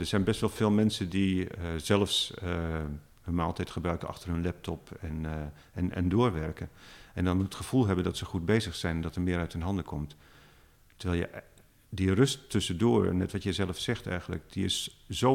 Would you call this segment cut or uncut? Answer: uncut